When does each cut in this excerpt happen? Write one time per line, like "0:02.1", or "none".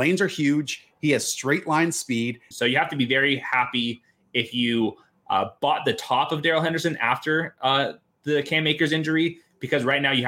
0:02.5